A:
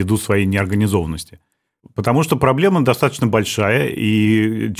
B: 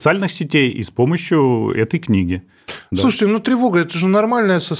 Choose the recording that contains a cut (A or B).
A